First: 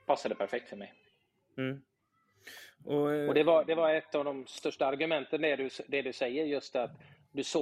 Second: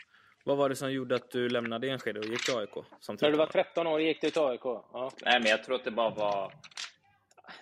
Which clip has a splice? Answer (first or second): second